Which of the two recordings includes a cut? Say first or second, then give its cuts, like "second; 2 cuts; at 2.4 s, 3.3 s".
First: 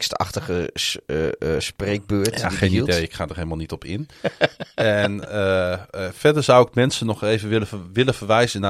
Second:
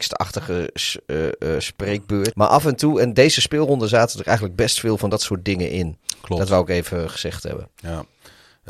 second; 1 cut; at 2.3 s